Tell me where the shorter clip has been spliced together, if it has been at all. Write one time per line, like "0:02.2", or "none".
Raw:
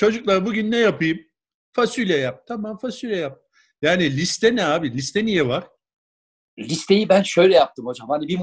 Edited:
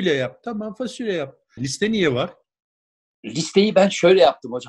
0:01.6